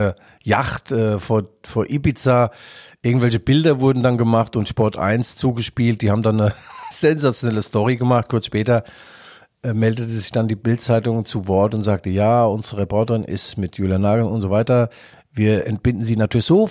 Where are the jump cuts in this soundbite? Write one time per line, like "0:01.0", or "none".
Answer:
none